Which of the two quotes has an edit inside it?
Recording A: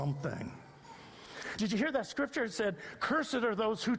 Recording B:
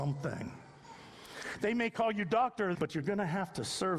B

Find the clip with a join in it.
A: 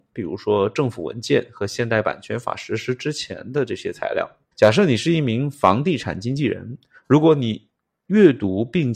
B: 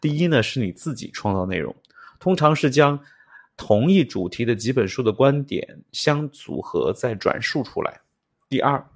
A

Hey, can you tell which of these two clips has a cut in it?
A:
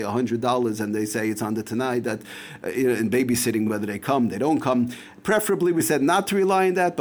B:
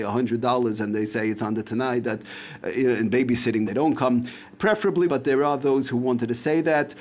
B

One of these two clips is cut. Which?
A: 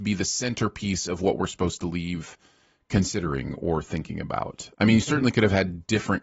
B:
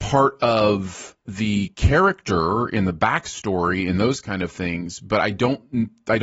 A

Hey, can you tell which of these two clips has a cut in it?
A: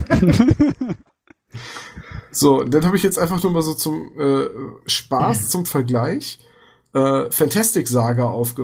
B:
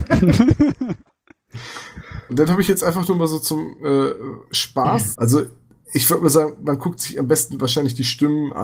B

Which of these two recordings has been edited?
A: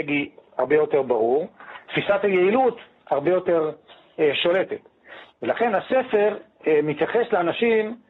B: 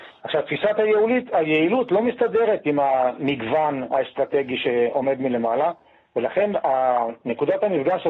A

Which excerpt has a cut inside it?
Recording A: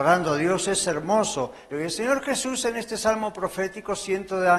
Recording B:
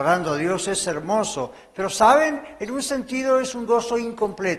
A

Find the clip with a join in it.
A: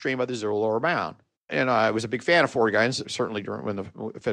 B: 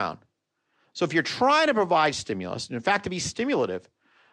A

